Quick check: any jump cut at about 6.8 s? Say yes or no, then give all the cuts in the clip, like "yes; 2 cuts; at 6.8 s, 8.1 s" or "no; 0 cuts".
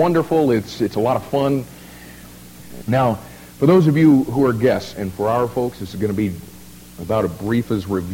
no; 2 cuts; at 2.8 s, 4.9 s